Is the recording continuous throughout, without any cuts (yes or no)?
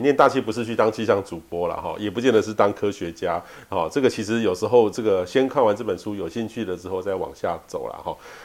yes